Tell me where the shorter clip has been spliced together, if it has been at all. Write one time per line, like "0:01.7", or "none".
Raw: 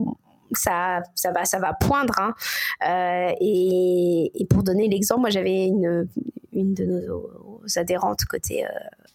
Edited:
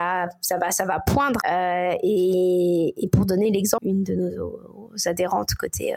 0:01.4
0:03.8